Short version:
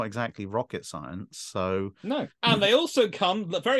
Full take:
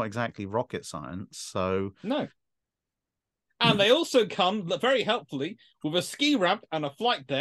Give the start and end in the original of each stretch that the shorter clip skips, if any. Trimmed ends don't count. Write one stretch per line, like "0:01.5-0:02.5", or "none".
0:02.3-0:03.5

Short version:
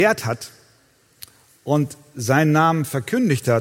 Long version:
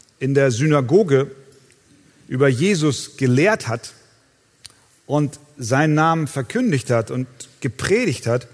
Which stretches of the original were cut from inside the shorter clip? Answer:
none

